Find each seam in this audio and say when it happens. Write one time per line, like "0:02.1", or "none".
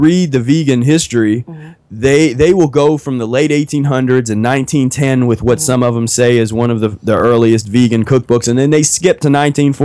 none